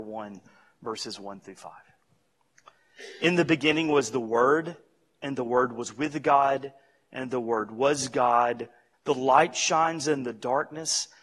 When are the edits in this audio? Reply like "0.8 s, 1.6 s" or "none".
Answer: 8.9 s